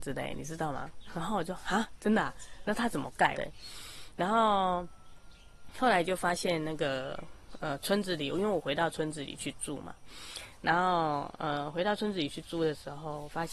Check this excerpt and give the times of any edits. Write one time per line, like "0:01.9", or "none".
0:03.3

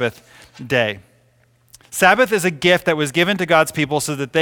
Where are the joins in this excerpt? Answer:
none

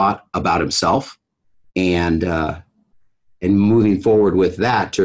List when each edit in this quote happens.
none

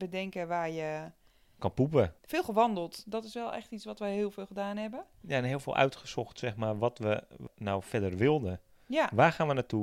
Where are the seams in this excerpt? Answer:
0:02.2

